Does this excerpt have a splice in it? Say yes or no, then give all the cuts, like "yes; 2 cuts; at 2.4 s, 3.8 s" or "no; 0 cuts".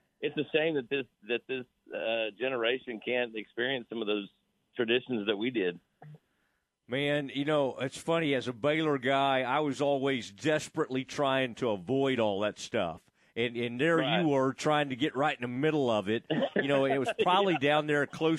no; 0 cuts